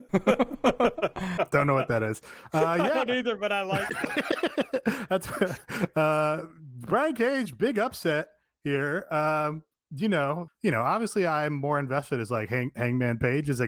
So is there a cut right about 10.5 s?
yes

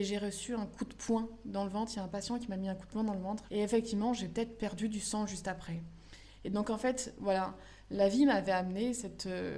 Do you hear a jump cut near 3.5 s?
yes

